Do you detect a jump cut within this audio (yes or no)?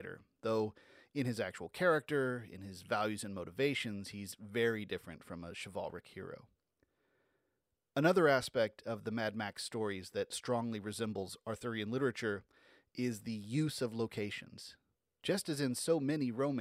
no